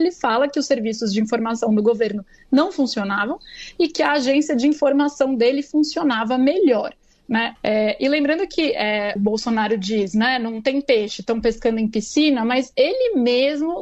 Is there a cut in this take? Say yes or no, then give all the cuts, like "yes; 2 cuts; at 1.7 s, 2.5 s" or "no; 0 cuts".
yes; 2 cuts; at 7.6 s, 9.2 s